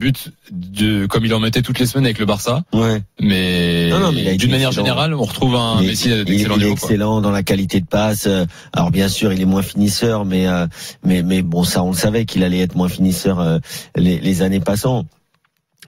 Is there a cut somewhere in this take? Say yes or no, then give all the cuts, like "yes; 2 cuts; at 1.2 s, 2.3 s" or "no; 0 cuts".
no; 0 cuts